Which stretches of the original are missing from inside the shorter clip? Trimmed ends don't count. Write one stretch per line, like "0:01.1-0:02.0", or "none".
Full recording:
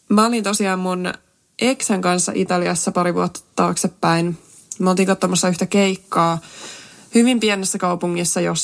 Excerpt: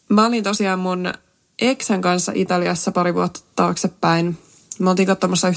none